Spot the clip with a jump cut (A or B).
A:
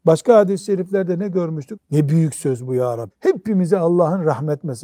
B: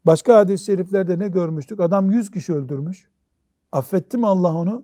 A